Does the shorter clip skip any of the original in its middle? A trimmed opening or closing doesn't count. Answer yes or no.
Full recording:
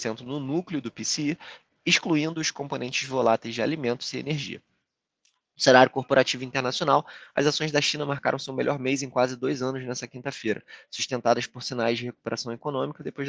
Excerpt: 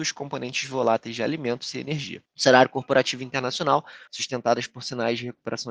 yes